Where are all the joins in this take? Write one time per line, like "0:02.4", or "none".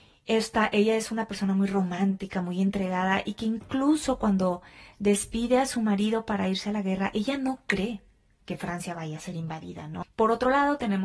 0:10.0